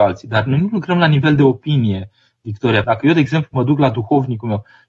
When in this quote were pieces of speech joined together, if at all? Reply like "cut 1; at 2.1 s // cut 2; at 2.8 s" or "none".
cut 1; at 2.8 s